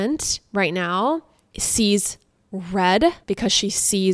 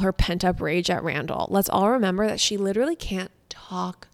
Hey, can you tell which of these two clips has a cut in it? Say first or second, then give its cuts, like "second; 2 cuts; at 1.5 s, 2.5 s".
first; 1 cut; at 3.2 s